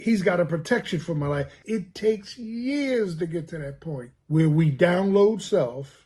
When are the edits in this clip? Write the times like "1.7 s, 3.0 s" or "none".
1.6 s, 4.2 s